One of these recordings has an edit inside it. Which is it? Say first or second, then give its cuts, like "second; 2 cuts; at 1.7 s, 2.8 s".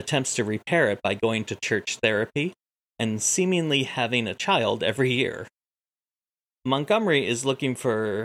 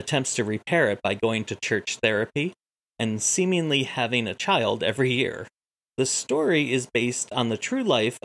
second; 1 cut; at 5.8 s